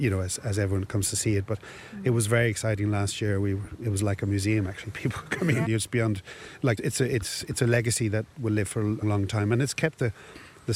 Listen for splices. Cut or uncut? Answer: cut